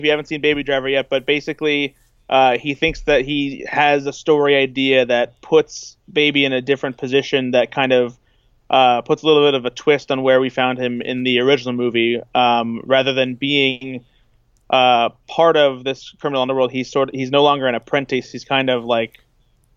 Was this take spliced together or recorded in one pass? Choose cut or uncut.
uncut